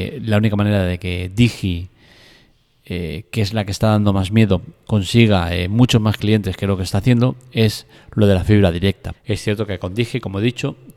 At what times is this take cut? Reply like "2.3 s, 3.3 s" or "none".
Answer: 9.1 s